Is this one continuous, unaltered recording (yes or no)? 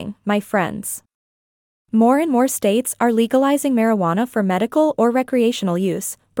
yes